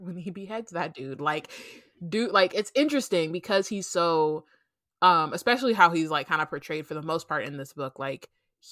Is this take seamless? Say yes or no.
yes